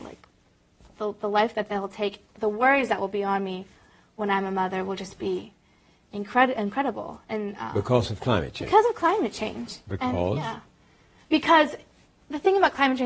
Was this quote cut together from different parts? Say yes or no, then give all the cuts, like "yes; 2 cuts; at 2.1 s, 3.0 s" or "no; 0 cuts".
no; 0 cuts